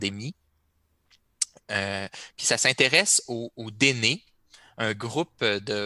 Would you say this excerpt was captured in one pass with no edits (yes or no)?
yes